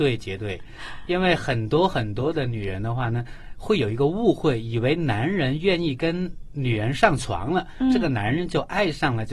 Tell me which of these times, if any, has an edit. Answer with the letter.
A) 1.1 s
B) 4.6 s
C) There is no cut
C